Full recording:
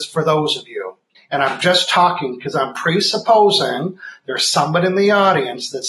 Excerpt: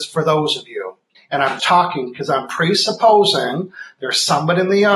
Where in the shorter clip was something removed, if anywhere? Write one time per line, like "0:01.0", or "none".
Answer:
0:01.6